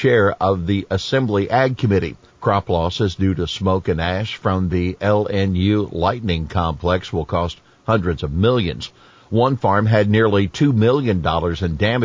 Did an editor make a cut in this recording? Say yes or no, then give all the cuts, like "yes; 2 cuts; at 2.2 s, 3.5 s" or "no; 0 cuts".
yes; 1 cut; at 2.3 s